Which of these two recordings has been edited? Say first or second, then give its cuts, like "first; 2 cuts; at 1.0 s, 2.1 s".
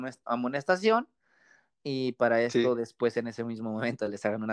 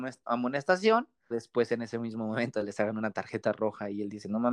second; 1 cut; at 1.3 s